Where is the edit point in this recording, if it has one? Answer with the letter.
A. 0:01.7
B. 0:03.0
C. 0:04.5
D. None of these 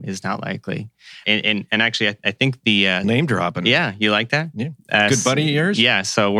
B